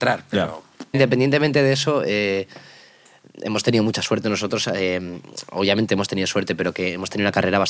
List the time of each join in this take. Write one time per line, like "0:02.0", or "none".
0:00.9